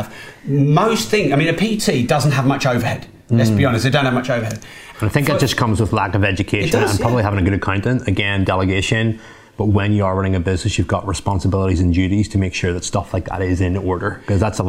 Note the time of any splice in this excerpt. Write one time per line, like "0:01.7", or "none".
0:04.9
0:09.5